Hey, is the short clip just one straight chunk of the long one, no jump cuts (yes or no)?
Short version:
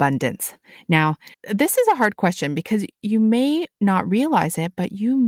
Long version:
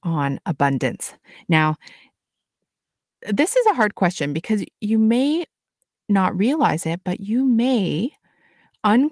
no